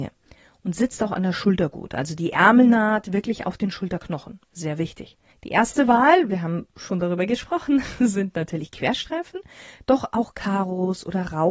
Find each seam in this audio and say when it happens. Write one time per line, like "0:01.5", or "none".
0:05.3